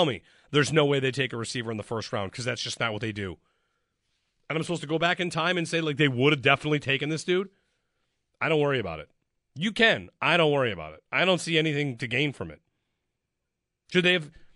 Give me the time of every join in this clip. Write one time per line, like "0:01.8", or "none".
none